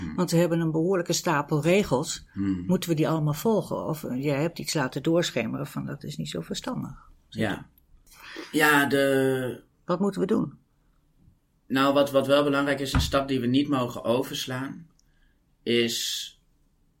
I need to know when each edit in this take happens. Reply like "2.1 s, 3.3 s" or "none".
none